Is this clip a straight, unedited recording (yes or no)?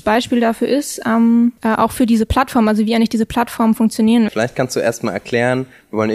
no